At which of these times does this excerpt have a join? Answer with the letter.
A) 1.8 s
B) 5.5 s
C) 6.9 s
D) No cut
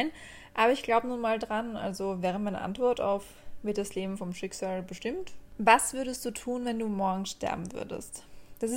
B